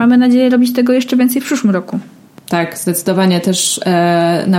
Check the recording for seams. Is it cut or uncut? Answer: uncut